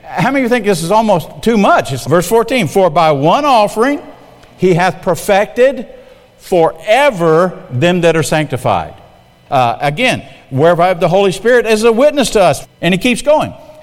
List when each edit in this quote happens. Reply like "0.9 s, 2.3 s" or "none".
2.0 s, 9.5 s, 12.6 s